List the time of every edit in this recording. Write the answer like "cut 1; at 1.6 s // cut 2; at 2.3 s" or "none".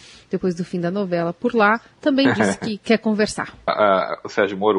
cut 1; at 3.7 s